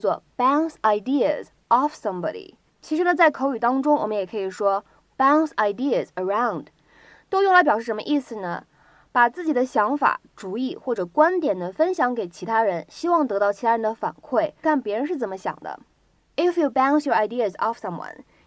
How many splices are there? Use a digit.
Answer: 1